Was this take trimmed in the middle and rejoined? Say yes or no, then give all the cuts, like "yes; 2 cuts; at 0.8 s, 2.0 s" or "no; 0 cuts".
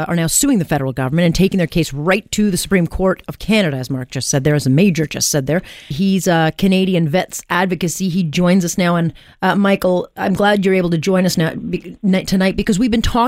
yes; 1 cut; at 5.9 s